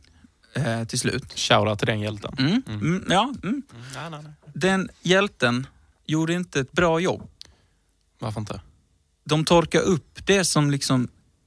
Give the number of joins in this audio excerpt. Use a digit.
0